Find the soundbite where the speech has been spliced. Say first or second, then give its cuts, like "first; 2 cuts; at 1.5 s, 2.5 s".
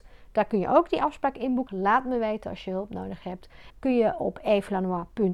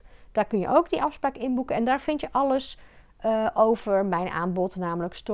first; 2 cuts; at 1.7 s, 3.7 s